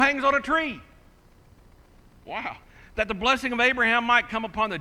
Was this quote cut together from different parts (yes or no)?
no